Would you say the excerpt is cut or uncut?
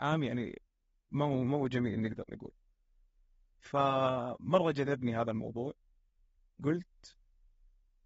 uncut